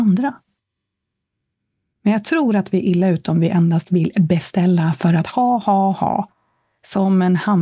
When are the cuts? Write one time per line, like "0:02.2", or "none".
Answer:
none

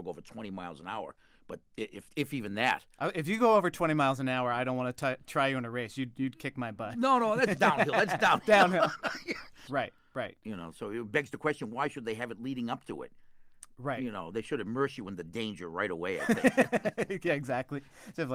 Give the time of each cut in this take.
0:09.7

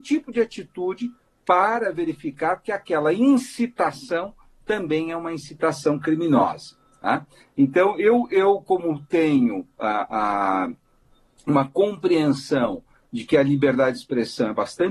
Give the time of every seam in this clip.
none

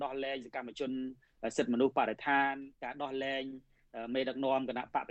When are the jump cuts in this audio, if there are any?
0:02.7

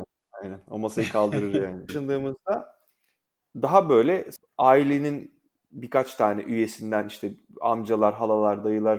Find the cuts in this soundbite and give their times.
0:01.9

